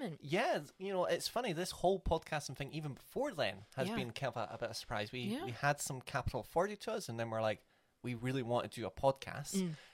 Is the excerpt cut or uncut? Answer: uncut